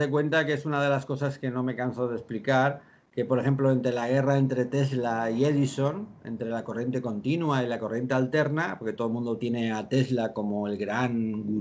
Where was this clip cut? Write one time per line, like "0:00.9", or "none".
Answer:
none